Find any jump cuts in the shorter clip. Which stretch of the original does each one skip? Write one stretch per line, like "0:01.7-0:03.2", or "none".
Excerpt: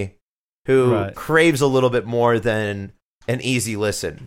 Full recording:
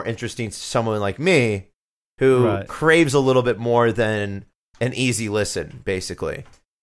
none